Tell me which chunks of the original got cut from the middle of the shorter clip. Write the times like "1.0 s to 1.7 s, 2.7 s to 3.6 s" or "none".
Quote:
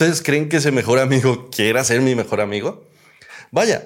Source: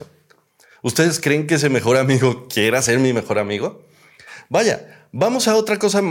none